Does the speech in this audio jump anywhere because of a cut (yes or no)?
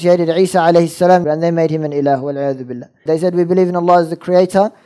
yes